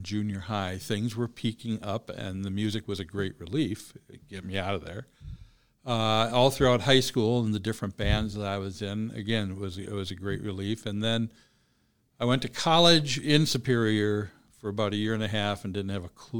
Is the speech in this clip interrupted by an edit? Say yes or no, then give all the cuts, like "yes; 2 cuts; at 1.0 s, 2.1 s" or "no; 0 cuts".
no; 0 cuts